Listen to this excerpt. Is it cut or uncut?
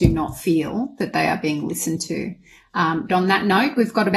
cut